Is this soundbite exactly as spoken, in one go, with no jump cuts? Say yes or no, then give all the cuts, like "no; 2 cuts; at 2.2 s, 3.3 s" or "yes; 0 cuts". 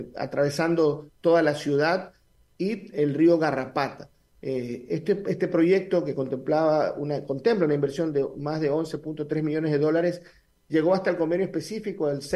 yes; 0 cuts